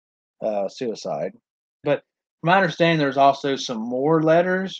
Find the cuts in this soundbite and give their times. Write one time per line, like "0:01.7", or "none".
0:01.8